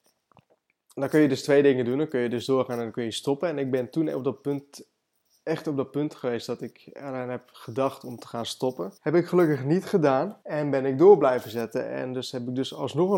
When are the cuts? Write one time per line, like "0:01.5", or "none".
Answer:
0:09.0
0:10.4